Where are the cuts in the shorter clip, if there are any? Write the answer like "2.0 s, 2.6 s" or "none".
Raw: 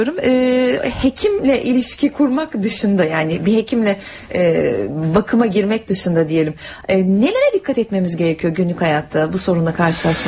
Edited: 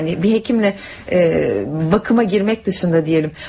none